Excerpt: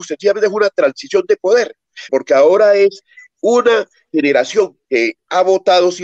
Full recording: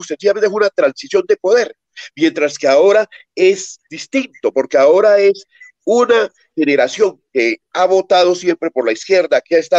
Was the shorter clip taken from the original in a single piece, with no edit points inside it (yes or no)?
no